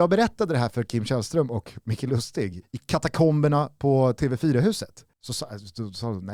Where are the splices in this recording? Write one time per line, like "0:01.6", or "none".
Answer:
0:05.1

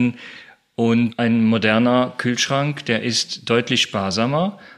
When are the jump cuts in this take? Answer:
none

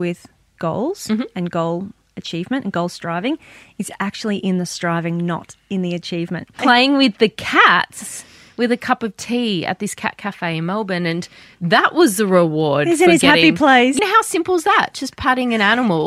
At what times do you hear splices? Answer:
0:06.6
0:14.0

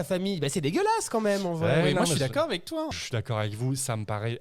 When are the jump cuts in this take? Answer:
none

